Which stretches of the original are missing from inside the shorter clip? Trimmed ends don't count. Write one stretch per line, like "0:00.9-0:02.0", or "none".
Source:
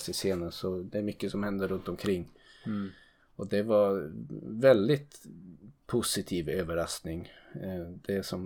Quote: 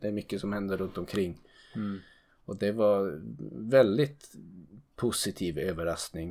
none